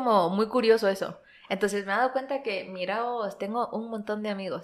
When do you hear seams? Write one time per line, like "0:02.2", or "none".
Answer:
none